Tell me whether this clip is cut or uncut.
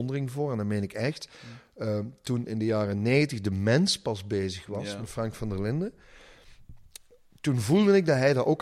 uncut